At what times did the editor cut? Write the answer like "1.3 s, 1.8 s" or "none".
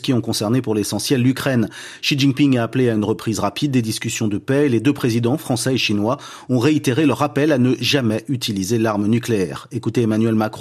none